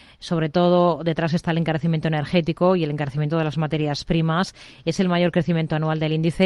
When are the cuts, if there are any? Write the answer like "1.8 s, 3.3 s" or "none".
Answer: none